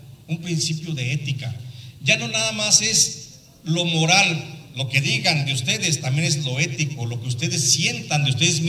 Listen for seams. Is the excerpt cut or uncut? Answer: uncut